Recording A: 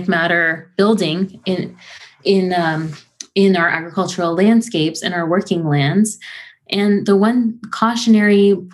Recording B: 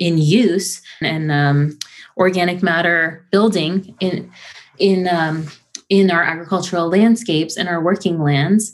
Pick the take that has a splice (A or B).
B